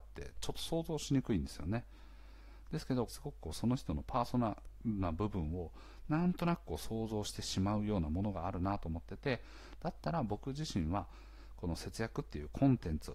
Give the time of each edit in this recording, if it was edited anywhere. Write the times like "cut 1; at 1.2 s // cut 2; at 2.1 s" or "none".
cut 1; at 3.1 s